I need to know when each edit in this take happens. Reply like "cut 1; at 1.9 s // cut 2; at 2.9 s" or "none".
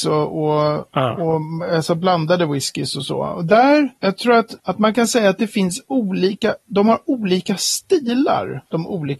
cut 1; at 4.6 s